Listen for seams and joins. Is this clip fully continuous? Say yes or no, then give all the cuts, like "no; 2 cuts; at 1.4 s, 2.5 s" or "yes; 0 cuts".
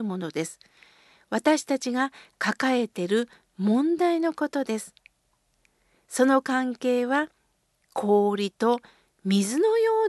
yes; 0 cuts